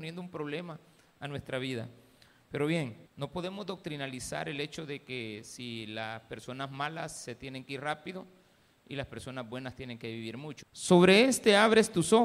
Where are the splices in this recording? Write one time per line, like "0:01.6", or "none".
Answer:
0:03.1
0:10.6